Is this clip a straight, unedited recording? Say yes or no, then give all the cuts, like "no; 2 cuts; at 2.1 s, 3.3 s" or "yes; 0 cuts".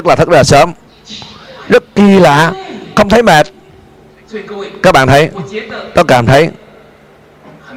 yes; 0 cuts